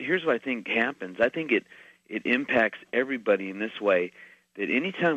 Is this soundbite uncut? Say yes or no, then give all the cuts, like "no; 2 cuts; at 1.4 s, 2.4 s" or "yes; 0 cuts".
yes; 0 cuts